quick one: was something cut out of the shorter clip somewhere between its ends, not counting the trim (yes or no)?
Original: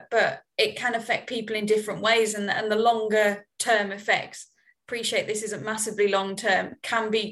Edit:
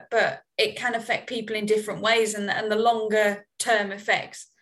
no